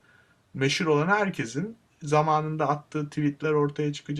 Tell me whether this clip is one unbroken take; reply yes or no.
yes